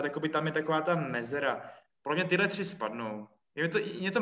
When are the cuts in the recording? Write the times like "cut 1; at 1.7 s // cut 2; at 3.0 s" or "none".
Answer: cut 1; at 2.0 s